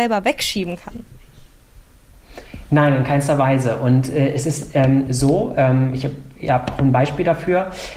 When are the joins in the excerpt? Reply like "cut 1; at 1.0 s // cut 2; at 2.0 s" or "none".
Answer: none